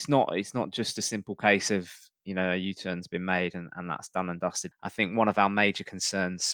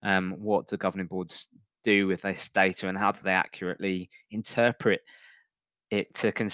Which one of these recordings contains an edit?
first; 1 cut; at 4.7 s

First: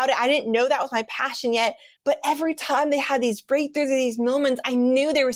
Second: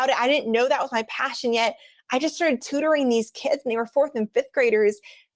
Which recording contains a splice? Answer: first; 1 cut; at 1.9 s

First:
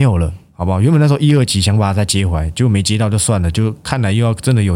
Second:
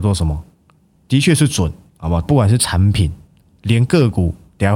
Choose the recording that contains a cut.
second; 2 cuts; at 1.0 s, 2.2 s

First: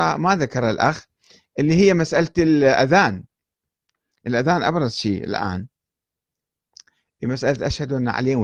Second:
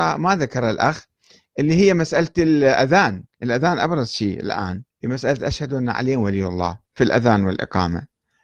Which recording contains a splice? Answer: second; 3 cuts; at 3.3 s, 4.9 s, 6.8 s

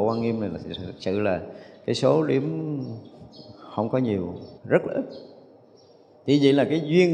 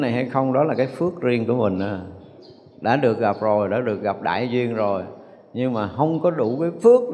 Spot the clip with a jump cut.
first; 1 cut; at 4.6 s

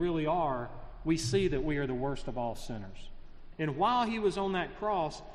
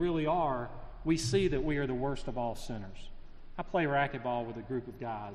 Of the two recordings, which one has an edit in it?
first; 1 cut; at 3.5 s

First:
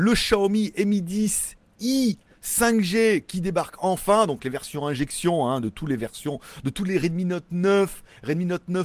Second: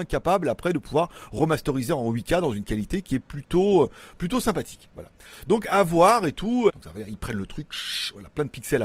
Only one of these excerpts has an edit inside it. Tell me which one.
second; 1 cut; at 6.7 s

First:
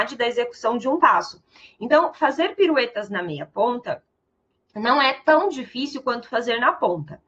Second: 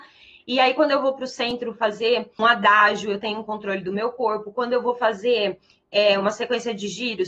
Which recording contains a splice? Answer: second; 1 cut; at 2.4 s

